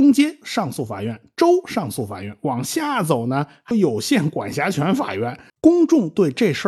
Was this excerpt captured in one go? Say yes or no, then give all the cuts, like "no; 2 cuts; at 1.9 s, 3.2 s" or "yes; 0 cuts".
no; 2 cuts; at 3.7 s, 5.5 s